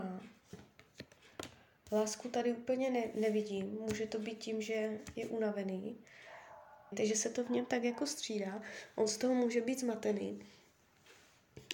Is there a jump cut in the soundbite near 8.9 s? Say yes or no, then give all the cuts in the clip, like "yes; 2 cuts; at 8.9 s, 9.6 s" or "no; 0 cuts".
no; 1 cut; at 6.9 s